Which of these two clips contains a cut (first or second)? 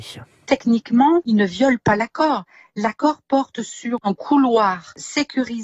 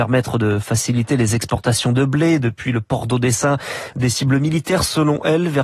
second